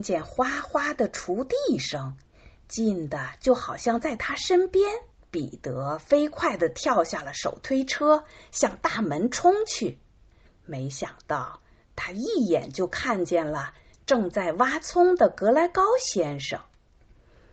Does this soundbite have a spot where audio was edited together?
yes; 2 cuts; at 5.2 s, 10.5 s

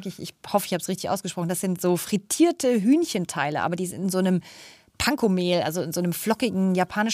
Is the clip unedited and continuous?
yes; 0 cuts

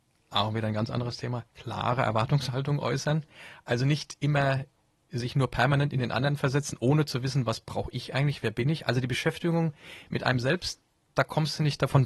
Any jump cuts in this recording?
no; 0 cuts

